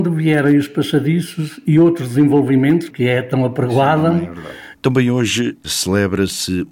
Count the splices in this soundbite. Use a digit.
2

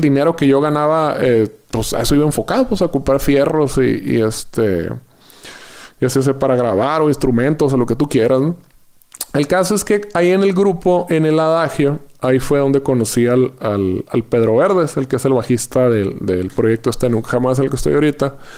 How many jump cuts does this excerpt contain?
0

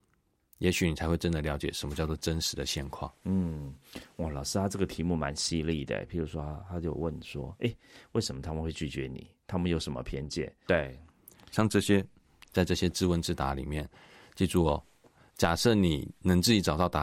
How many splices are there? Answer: 1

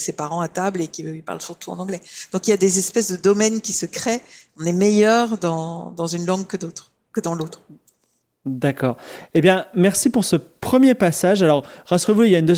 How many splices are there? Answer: 0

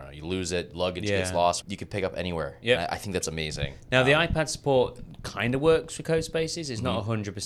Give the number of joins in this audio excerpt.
1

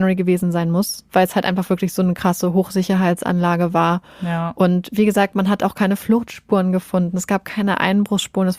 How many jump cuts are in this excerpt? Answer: 0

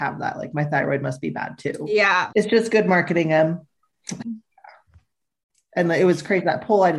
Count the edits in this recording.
2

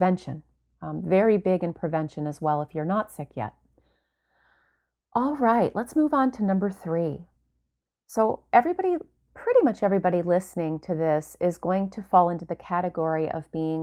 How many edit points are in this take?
0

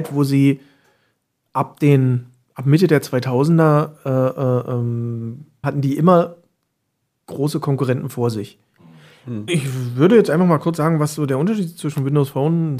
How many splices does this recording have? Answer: 2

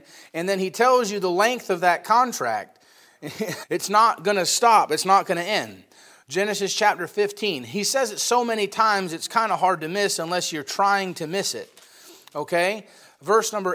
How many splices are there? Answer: 1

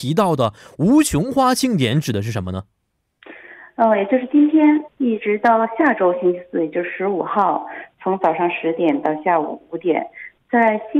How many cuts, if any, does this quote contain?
1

